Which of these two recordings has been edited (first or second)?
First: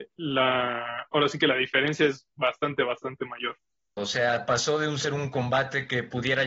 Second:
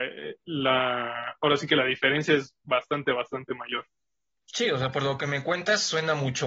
first